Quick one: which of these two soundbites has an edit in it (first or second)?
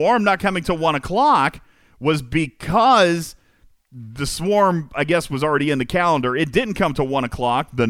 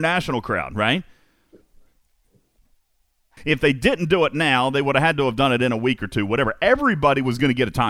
second